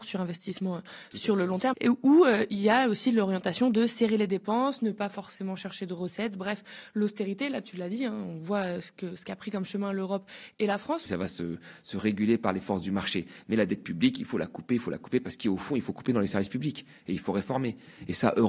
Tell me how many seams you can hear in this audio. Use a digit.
2